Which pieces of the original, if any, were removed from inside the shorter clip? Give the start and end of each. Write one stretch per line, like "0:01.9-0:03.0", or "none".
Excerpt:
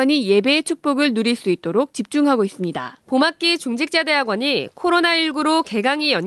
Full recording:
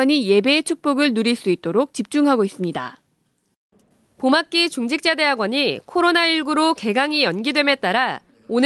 0:03.0-0:04.1